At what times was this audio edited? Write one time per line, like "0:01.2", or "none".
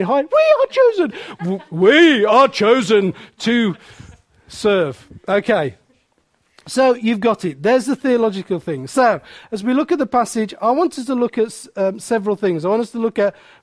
none